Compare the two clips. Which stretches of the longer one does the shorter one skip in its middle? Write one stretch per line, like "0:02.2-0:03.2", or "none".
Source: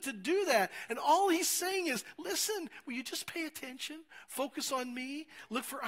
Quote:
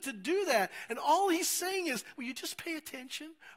0:02.1-0:02.8